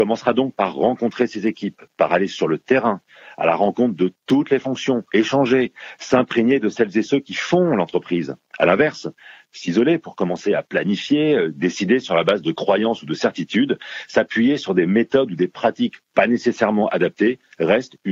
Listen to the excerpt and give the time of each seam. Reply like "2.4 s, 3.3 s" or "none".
5.1 s